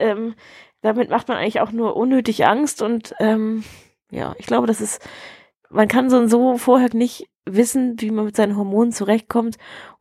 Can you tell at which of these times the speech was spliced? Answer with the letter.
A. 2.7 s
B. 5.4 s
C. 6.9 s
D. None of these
C